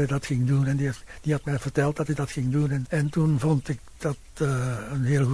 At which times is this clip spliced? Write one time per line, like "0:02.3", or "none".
0:02.9